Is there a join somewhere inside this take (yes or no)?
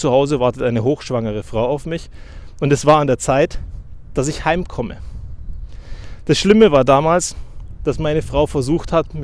no